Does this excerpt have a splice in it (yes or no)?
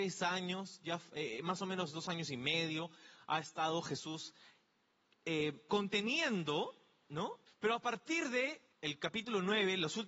yes